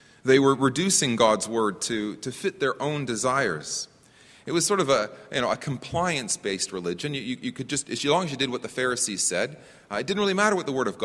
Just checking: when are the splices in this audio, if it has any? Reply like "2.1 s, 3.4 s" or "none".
none